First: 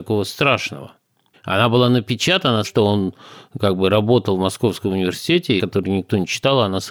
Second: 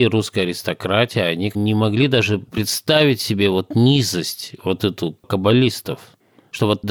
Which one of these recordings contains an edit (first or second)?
first